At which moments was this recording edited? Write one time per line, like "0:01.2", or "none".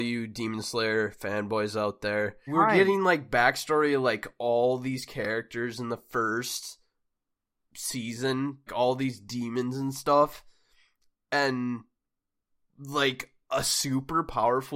0:02.5
0:08.7